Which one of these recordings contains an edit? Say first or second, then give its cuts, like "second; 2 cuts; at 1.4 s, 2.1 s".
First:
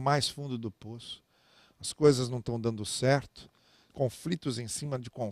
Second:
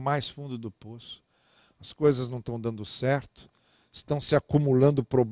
first; 1 cut; at 3.9 s